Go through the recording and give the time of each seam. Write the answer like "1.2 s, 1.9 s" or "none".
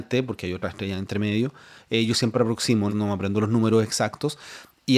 1.8 s, 2.9 s